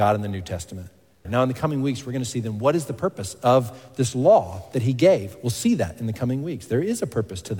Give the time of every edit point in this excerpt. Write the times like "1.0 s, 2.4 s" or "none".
1.2 s